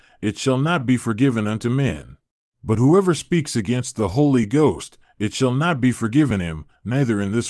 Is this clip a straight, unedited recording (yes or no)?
no